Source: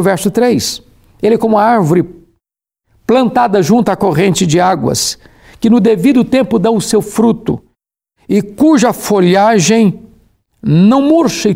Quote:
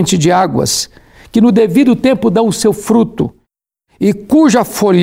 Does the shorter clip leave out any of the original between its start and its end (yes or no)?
no